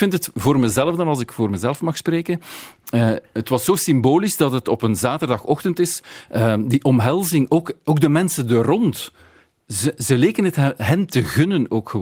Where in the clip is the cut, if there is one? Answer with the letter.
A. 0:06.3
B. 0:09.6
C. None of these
A